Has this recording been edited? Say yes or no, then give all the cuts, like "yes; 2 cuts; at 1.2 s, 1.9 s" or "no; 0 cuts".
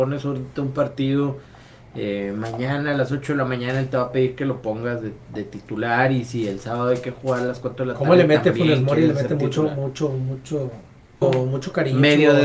yes; 1 cut; at 11.2 s